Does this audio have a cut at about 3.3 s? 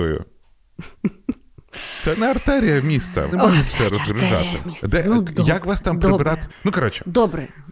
yes; 2 cuts; at 3.3 s, 6.5 s

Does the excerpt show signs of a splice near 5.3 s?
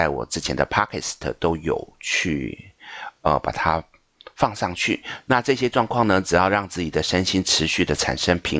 yes; 1 cut; at 5.3 s

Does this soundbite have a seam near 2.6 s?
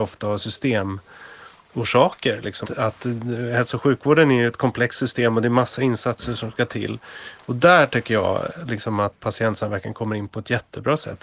yes; 2 cuts; at 2.6 s, 9.2 s

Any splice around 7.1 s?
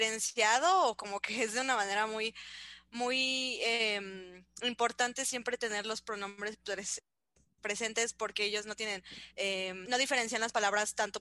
no; 1 cut; at 9.9 s

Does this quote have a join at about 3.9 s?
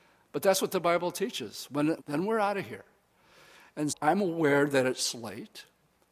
yes; 2 cuts; at 2.0 s, 3.9 s

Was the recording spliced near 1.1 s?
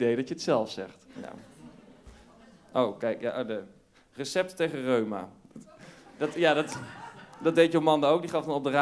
yes; 1 cut; at 1.1 s

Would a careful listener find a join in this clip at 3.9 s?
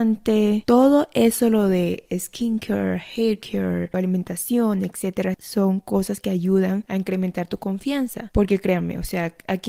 yes; 2 cuts; at 3.9 s, 5.3 s

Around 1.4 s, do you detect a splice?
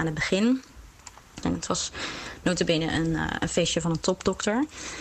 yes; 1 cut; at 1.4 s

